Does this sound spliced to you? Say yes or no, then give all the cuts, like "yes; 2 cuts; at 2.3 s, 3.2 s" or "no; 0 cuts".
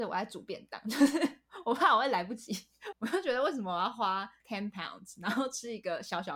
yes; 1 cut; at 2.9 s